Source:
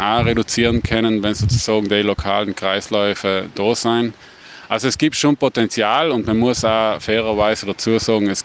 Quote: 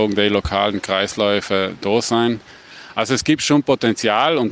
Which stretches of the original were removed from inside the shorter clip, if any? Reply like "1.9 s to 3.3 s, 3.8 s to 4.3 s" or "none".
none